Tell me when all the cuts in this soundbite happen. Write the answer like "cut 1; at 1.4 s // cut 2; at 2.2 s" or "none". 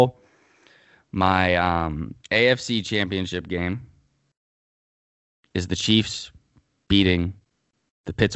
cut 1; at 2.2 s